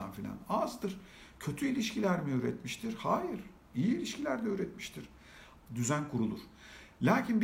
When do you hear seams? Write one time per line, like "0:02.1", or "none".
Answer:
0:05.6